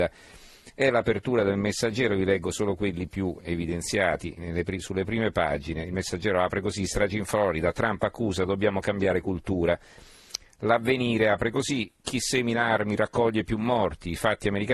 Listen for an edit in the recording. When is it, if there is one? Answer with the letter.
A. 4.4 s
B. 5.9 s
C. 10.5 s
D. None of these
A